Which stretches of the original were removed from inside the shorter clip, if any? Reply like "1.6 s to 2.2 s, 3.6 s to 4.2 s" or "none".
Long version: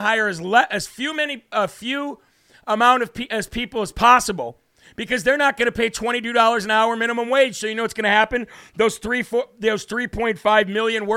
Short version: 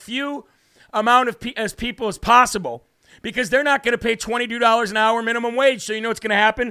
none